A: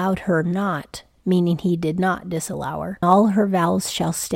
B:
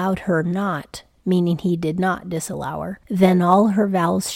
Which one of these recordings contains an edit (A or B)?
A